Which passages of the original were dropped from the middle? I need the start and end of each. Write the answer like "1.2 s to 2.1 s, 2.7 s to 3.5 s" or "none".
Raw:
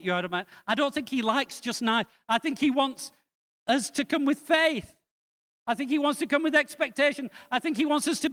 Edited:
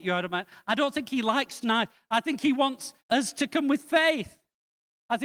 1.6 s to 1.8 s, 3.2 s to 3.6 s